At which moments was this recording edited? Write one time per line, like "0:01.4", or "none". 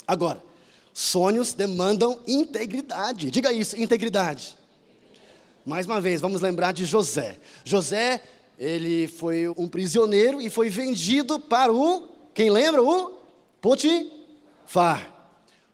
0:09.5